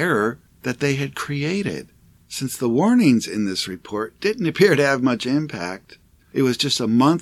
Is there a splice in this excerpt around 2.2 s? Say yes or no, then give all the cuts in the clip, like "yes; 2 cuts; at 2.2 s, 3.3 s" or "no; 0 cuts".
yes; 1 cut; at 2.2 s